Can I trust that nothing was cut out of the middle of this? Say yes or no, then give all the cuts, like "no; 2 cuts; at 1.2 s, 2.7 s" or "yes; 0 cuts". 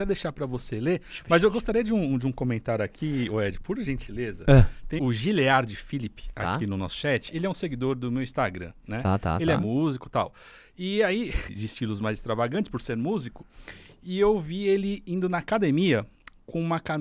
no; 2 cuts; at 5.0 s, 11.5 s